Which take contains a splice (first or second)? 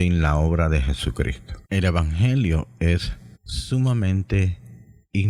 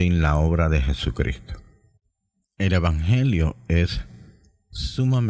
first